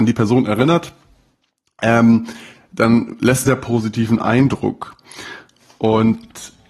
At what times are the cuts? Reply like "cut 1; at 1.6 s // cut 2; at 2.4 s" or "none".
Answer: cut 1; at 3.5 s